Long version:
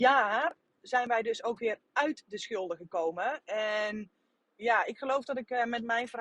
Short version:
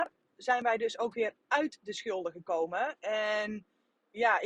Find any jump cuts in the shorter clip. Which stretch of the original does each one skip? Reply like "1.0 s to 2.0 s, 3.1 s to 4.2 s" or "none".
none